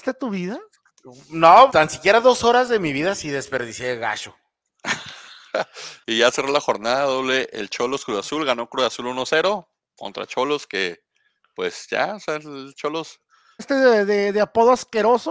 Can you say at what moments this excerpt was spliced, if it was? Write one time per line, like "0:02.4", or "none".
0:01.7
0:13.6